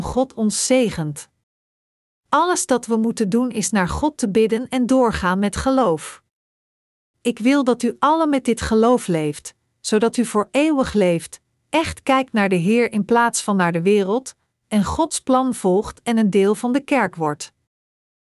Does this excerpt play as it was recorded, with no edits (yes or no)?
yes